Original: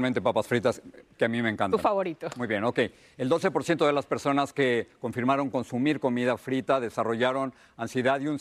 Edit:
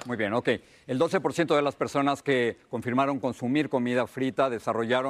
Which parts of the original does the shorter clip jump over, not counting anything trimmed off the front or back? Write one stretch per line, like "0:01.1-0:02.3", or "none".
none